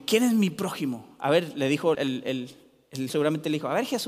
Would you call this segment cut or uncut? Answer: cut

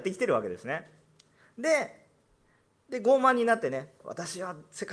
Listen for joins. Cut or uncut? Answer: uncut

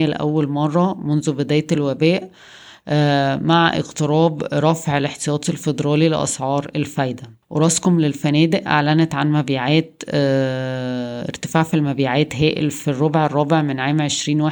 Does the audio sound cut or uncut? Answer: cut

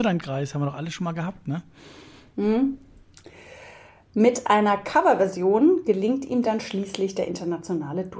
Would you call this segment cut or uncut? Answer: uncut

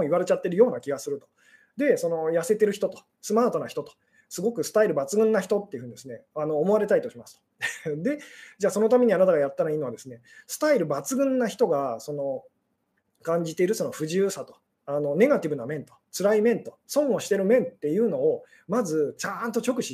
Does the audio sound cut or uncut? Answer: uncut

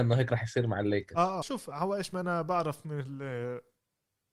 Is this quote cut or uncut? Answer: cut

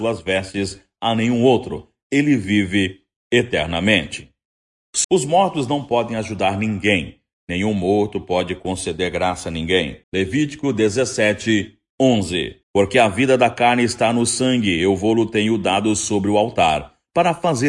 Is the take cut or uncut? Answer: cut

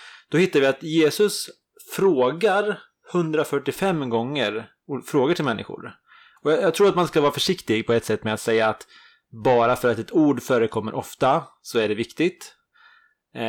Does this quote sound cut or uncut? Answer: cut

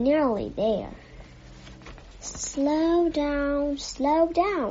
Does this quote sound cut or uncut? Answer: uncut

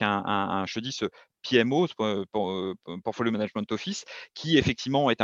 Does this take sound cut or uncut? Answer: uncut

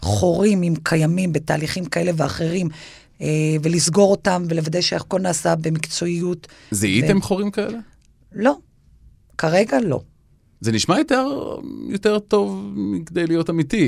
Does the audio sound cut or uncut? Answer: uncut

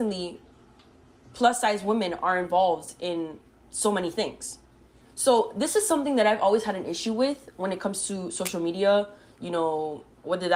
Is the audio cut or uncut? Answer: cut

